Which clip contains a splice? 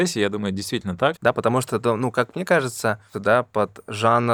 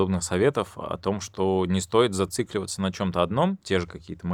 first; 2 cuts; at 1.2 s, 3.1 s

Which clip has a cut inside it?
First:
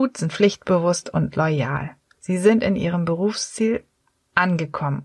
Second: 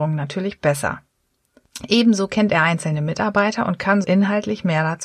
second; 1 cut; at 4.0 s

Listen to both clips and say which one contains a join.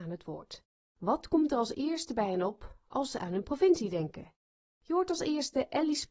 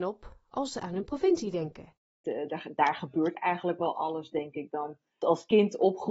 second; 1 cut; at 2.2 s

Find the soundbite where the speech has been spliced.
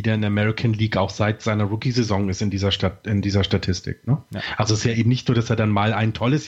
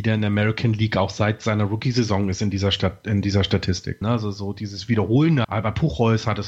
second; 2 cuts; at 4.0 s, 5.4 s

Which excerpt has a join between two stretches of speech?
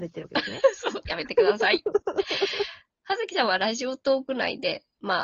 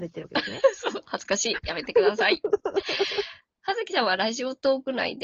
first; 1 cut; at 1.0 s

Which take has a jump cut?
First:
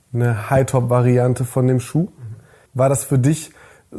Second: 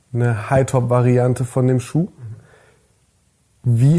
first; 1 cut; at 2.7 s

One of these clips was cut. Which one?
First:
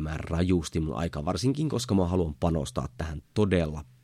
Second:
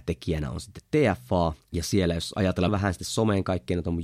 second; 2 cuts; at 1.6 s, 2.7 s

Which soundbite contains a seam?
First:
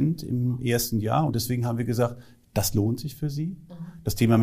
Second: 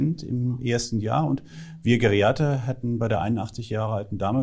first; 1 cut; at 1.3 s

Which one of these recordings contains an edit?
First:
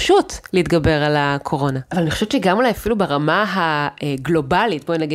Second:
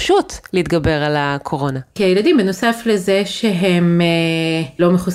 first; 1 cut; at 1.9 s

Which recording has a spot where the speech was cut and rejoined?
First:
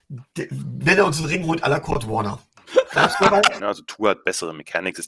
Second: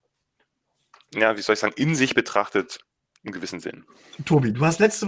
first; 1 cut; at 3.6 s

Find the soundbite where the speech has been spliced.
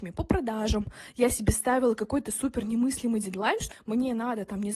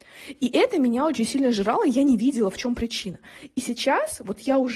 first; 1 cut; at 3.7 s

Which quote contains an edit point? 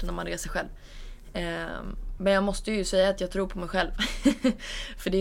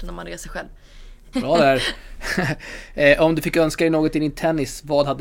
second; 1 cut; at 1.3 s

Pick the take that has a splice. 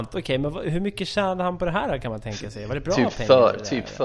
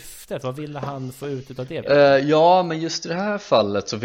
second; 1 cut; at 1.8 s

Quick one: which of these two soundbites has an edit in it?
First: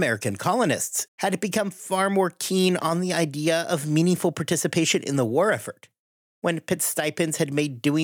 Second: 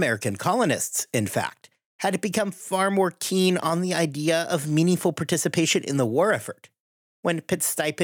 first; 1 cut; at 1.1 s

